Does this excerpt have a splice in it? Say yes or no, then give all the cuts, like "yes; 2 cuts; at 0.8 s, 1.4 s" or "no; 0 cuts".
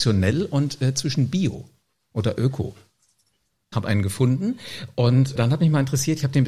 yes; 2 cuts; at 3.7 s, 5.4 s